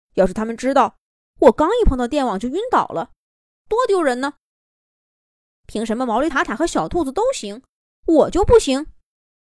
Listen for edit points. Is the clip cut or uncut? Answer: uncut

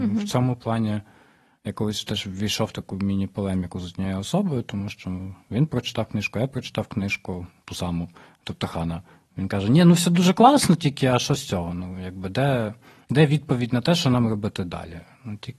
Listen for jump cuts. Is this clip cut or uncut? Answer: uncut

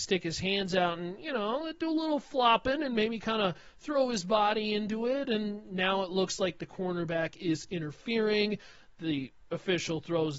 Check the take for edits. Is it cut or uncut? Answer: uncut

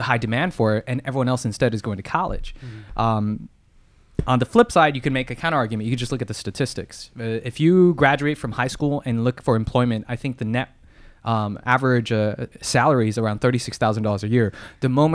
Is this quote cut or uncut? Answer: uncut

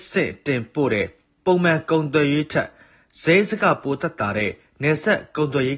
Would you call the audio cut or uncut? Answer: uncut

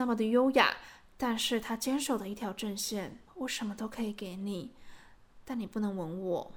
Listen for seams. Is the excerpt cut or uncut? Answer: uncut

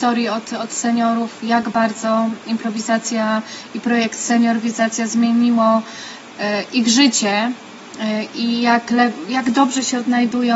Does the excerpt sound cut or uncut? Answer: uncut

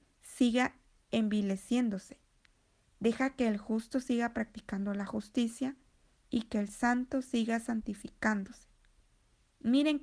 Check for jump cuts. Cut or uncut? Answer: uncut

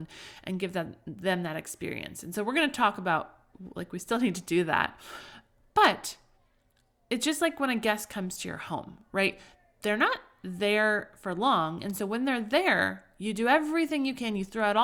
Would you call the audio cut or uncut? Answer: uncut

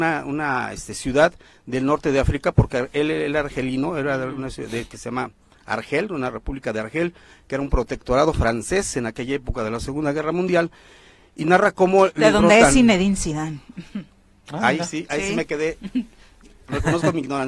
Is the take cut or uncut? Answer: uncut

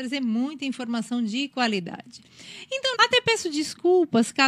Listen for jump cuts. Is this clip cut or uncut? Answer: cut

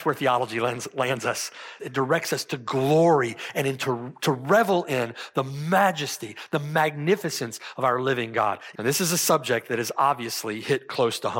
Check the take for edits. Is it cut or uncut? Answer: cut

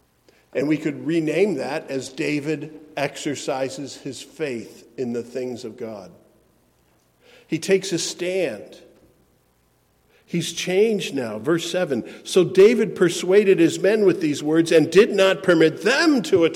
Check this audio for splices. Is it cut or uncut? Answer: uncut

